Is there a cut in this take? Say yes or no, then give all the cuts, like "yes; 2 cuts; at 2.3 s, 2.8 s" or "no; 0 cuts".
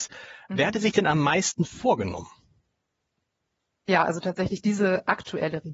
no; 0 cuts